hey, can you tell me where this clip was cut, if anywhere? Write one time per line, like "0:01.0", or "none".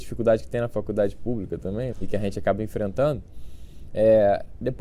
0:01.9